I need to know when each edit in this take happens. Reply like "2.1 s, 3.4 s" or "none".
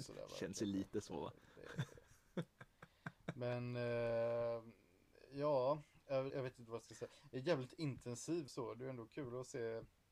6.3 s, 8.5 s